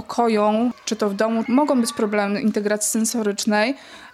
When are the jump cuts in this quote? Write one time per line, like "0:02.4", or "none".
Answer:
0:01.5